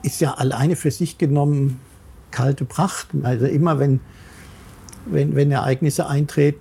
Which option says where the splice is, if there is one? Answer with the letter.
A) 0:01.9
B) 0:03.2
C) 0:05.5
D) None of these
B